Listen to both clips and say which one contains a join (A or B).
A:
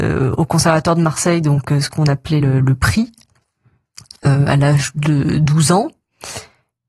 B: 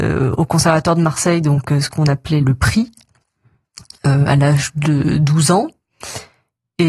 B